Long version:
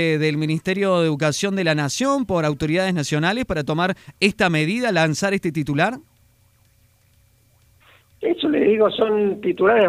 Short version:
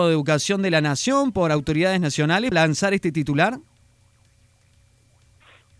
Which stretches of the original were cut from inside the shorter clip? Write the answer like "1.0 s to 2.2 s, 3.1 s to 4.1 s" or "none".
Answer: 3.5 s to 4.9 s